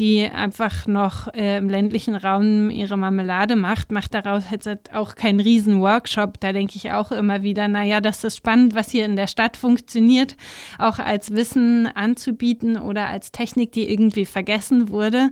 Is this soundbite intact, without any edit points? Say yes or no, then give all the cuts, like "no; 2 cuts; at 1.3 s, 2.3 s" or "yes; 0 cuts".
yes; 0 cuts